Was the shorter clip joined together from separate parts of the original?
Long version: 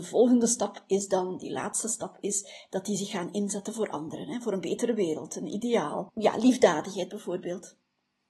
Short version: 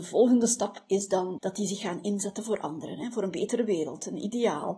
yes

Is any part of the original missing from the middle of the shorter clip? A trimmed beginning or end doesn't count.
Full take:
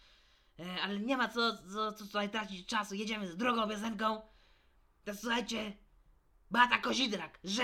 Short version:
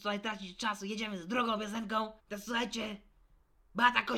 yes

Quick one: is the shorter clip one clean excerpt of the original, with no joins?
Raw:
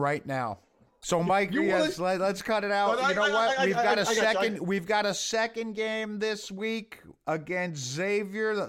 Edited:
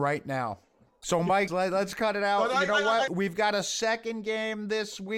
no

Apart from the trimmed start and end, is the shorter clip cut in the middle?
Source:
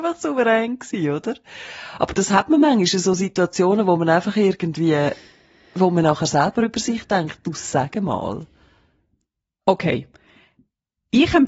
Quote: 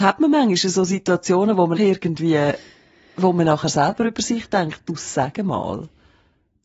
yes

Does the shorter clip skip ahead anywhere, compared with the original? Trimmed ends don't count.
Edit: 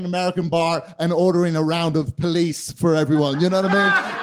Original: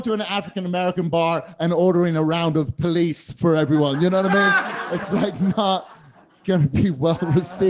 no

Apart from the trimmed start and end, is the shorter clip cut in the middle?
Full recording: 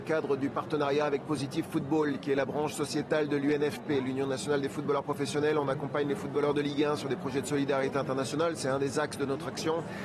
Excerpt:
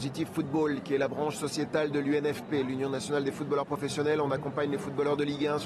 no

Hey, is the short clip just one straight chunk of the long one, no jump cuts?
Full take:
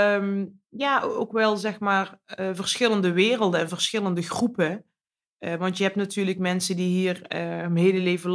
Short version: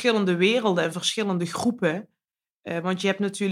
yes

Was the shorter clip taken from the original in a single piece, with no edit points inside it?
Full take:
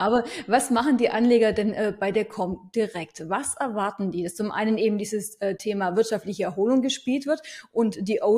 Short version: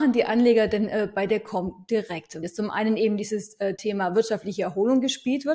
no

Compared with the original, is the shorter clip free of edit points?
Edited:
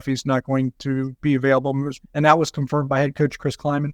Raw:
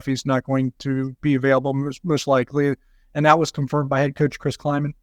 no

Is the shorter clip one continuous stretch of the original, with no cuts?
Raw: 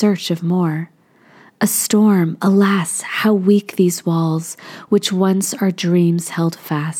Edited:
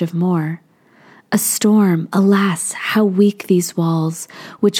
yes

